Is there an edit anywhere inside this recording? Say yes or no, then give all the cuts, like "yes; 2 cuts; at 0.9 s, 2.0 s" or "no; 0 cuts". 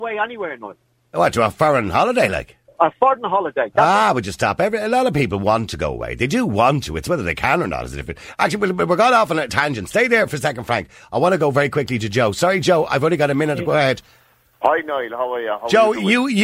no; 0 cuts